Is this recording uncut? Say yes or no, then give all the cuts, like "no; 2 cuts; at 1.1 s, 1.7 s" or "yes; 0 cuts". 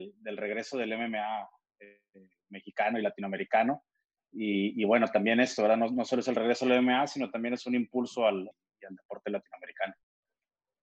no; 1 cut; at 8.5 s